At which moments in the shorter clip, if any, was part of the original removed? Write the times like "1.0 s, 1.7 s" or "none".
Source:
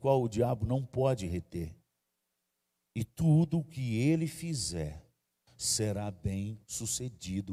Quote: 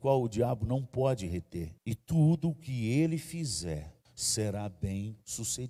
1.8 s, 4.0 s